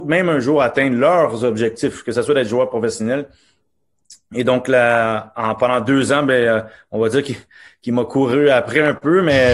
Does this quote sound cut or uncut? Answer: uncut